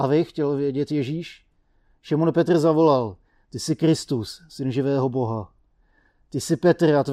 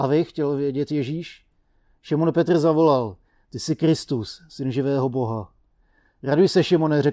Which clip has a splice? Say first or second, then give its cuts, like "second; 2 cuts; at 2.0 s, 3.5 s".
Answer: first; 1 cut; at 6.1 s